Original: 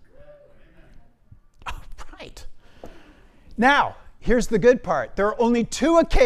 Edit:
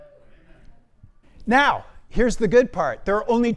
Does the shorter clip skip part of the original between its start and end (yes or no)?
yes